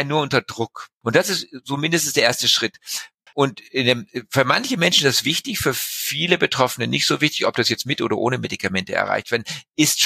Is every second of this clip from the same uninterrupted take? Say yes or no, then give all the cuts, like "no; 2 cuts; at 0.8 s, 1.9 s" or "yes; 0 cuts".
no; 2 cuts; at 1.0 s, 3.3 s